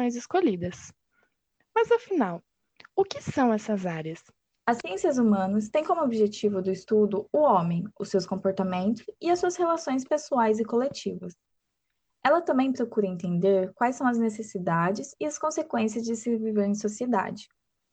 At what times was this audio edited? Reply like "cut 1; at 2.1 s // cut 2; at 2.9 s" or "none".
none